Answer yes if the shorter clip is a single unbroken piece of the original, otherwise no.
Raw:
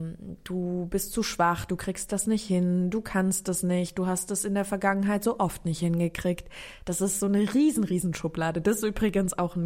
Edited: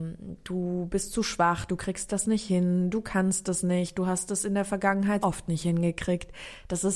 no